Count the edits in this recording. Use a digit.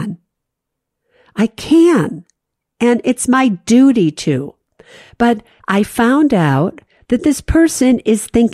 0